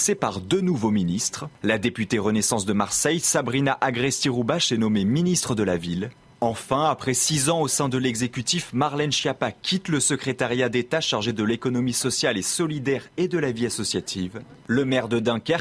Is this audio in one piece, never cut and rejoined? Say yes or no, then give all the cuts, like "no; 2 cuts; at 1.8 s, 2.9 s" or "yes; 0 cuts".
no; 2 cuts; at 6.3 s, 14.6 s